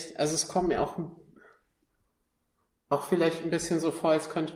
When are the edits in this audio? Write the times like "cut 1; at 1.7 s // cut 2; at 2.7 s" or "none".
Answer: none